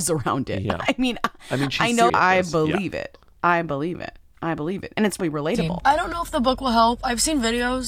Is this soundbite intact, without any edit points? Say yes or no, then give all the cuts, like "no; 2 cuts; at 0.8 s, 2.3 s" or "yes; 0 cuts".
no; 2 cuts; at 2.1 s, 5.2 s